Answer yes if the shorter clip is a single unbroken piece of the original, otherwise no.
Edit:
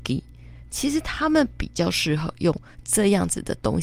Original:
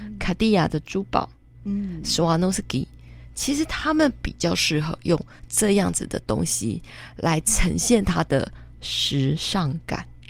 yes